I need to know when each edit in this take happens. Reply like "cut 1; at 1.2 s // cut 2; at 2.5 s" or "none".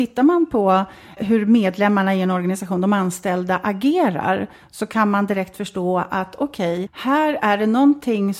cut 1; at 1.2 s // cut 2; at 6.9 s